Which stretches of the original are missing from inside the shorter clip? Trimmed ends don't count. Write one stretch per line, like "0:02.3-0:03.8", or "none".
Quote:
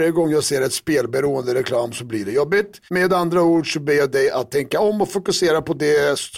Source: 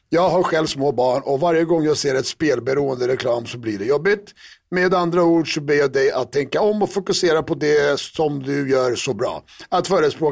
0:04.4-0:04.7